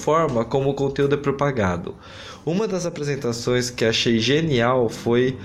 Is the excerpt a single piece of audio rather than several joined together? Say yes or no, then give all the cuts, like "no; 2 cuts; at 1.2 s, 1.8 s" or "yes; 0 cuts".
yes; 0 cuts